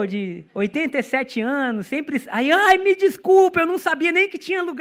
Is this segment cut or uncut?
uncut